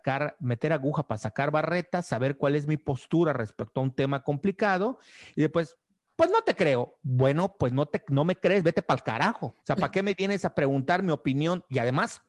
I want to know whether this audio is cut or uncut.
cut